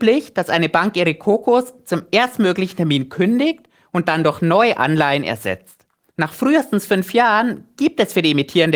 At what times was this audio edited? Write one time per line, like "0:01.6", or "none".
0:06.1